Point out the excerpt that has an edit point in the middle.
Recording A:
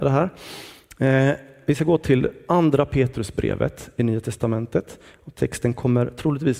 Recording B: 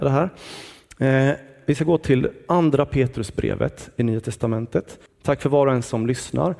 B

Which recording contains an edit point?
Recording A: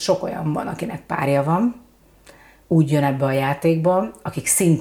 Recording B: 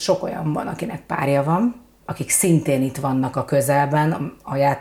B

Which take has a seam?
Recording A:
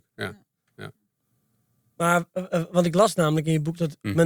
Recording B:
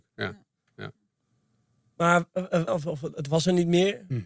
B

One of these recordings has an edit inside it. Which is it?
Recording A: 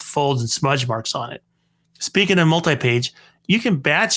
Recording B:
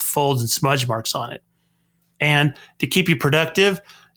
A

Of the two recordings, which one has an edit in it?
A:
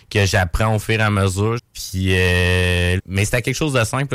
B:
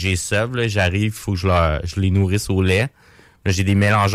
A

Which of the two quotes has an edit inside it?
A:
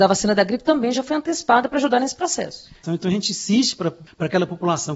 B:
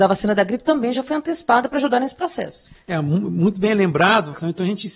A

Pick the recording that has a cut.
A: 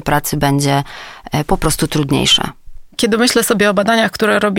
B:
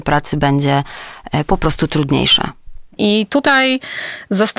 B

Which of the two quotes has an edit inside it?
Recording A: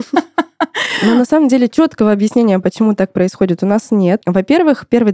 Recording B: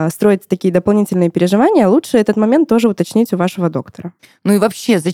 A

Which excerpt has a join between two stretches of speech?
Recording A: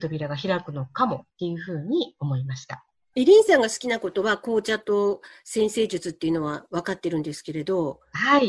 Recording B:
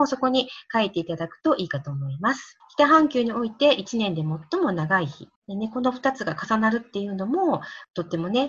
B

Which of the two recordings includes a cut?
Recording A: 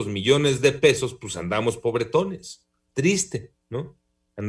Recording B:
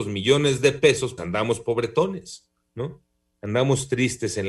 B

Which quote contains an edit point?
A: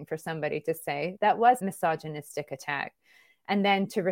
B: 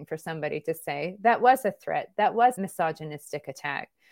A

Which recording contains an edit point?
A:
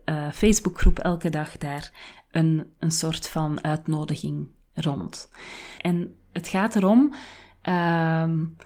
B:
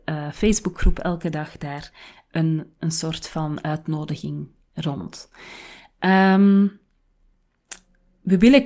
A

